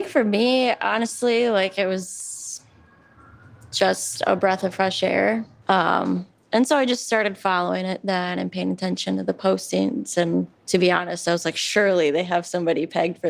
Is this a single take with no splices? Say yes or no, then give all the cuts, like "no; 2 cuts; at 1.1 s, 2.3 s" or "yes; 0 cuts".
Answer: no; 2 cuts; at 5.6 s, 10.6 s